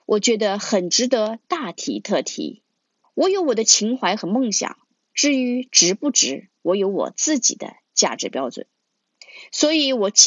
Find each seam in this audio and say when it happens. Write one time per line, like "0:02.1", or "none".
0:03.0